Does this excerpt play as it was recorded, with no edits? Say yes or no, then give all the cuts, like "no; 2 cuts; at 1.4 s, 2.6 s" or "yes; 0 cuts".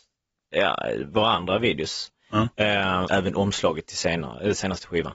no; 1 cut; at 3.1 s